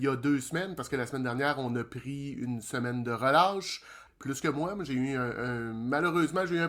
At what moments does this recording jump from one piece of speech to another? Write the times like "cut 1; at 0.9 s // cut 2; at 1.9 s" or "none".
cut 1; at 4.1 s